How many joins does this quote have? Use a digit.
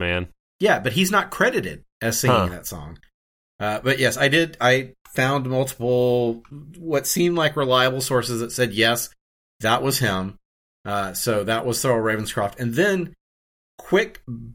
0